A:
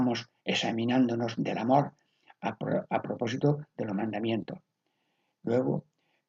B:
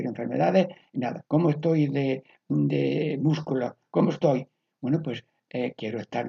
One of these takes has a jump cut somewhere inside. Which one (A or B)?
B